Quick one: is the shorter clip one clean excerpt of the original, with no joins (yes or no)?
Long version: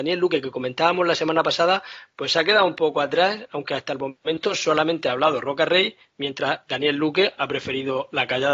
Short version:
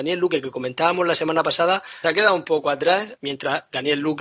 no